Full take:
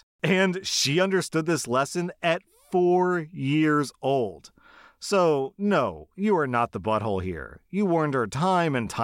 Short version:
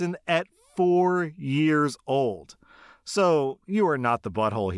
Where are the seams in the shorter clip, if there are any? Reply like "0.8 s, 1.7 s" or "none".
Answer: 3.6 s